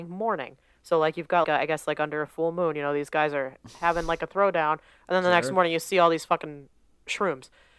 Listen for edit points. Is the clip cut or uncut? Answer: cut